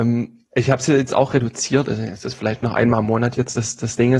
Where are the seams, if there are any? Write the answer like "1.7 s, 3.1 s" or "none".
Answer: none